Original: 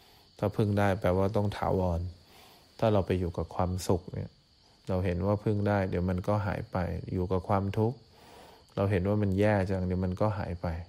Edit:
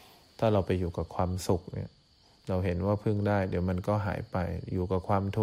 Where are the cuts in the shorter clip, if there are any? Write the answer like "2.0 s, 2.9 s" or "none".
none